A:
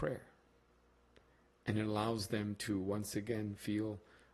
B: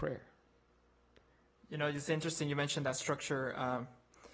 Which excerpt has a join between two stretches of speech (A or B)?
B